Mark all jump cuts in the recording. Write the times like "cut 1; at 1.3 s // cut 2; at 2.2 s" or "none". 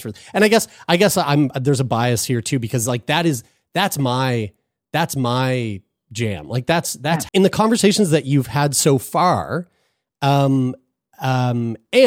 cut 1; at 7.3 s